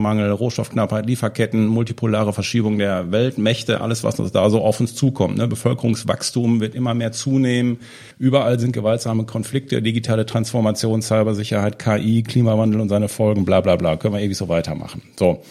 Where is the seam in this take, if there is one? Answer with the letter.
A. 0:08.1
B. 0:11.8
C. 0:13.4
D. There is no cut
A